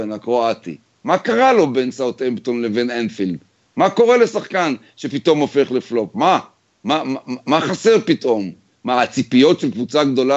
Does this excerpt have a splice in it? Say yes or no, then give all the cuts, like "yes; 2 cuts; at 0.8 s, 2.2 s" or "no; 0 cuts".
no; 0 cuts